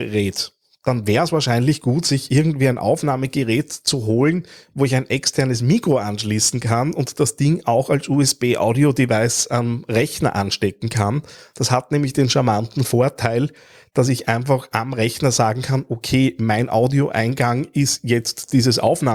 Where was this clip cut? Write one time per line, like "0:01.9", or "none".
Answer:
none